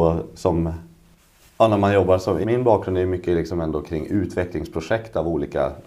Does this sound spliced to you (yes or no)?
yes